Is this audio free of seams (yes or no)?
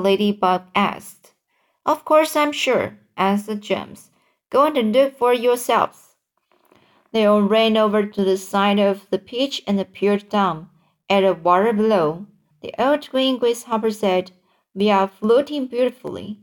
no